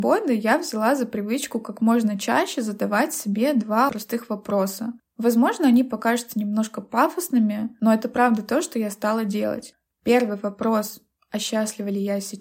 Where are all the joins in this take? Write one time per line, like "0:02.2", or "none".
0:03.9